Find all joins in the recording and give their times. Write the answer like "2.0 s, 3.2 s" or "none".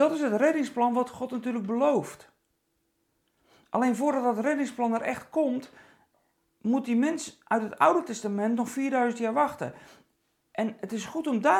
none